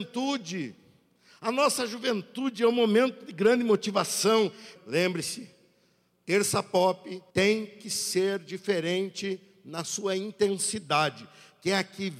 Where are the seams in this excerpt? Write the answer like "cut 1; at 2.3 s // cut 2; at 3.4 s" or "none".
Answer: cut 1; at 4.8 s // cut 2; at 7.3 s